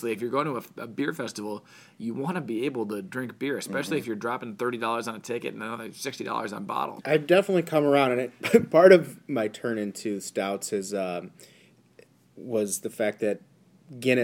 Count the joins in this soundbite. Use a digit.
1